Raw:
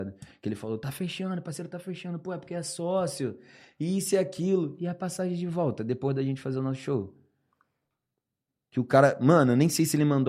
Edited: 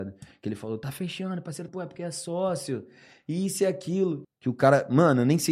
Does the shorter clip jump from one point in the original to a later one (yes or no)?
yes